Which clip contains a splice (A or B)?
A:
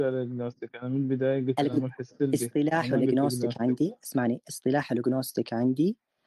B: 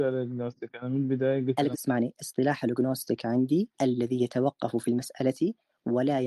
B